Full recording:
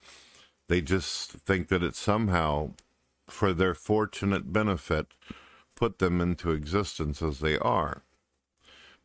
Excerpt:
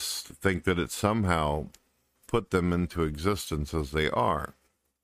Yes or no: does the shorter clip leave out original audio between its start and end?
yes